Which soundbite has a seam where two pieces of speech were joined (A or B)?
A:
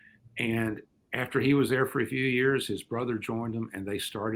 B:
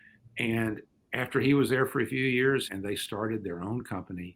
B